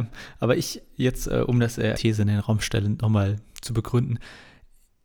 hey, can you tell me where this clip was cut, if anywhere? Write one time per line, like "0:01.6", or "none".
0:01.9